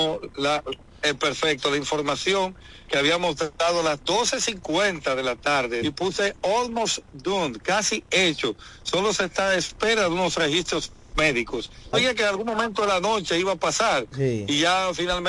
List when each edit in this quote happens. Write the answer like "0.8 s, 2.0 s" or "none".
5.8 s, 11.9 s